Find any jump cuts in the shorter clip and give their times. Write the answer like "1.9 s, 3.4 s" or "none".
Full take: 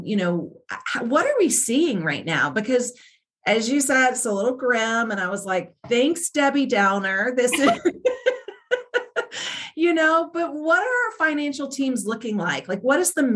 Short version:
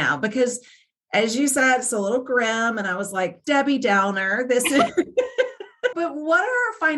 3.4 s, 5.9 s